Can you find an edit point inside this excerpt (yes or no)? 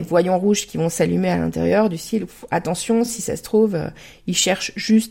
no